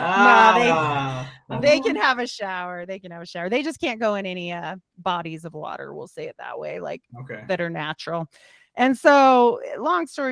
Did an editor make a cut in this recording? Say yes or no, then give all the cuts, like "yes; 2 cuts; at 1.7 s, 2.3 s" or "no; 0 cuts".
no; 0 cuts